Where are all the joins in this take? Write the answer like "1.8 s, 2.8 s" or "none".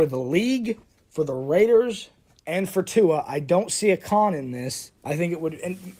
5.0 s